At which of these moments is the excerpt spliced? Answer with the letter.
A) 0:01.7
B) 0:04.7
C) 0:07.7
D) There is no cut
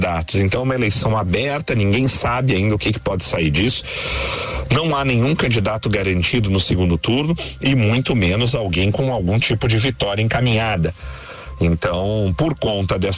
D